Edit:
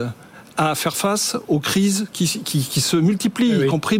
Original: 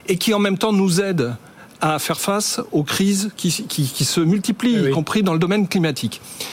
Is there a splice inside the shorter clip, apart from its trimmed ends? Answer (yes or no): no